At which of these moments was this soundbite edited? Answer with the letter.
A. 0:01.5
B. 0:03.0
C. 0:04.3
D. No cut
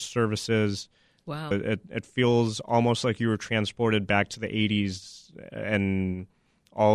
A